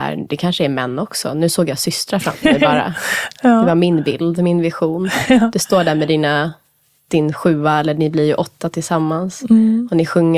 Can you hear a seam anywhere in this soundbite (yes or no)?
no